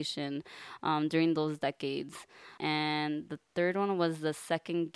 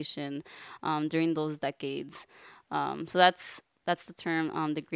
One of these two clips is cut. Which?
first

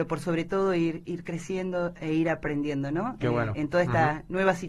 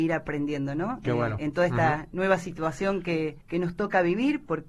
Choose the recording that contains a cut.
second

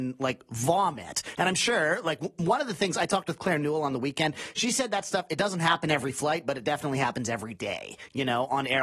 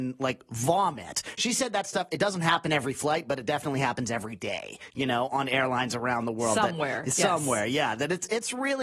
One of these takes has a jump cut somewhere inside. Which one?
second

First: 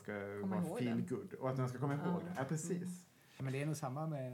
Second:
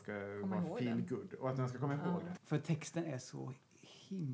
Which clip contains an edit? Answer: second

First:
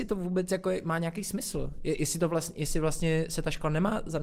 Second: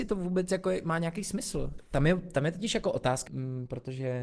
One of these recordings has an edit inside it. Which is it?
second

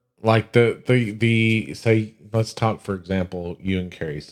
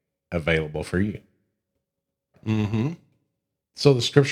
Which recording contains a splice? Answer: second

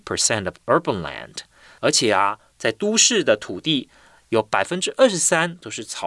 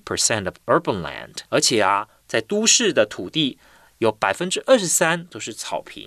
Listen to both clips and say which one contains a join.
second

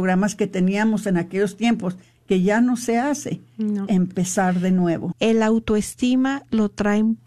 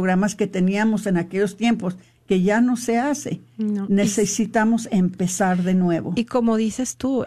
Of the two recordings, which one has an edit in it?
first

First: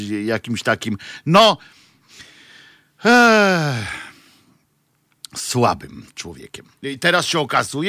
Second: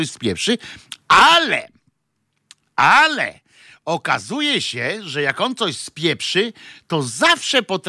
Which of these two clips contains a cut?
first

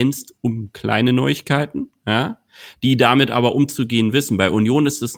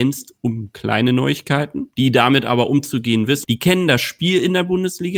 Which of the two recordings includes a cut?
second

